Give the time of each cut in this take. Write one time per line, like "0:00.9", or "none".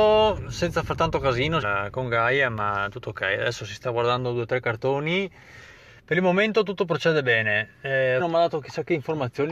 0:01.6
0:08.2